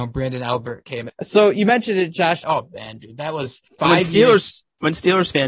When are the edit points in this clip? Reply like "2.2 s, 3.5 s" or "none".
1.1 s, 2.4 s, 3.7 s

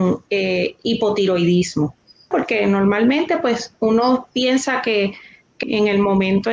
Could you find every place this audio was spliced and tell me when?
2.3 s, 5.6 s

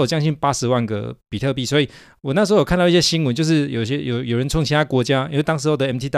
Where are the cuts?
none

